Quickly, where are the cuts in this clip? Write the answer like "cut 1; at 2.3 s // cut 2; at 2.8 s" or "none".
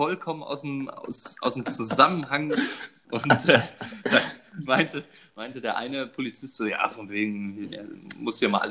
cut 1; at 3.0 s